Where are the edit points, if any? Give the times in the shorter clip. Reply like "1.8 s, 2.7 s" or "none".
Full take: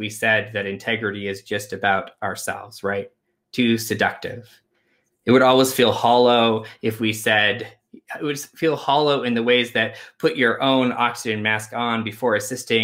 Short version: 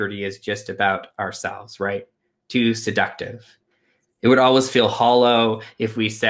none